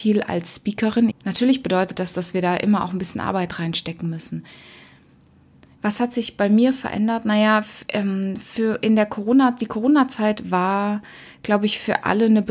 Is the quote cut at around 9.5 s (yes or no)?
no